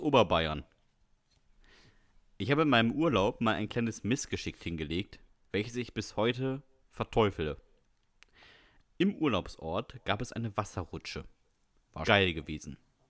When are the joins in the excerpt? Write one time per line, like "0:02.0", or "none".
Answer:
0:12.1